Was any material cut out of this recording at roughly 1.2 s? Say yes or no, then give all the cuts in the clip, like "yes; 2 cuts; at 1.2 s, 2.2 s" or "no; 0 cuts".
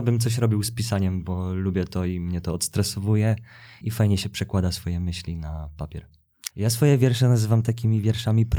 no; 2 cuts; at 3.8 s, 6.5 s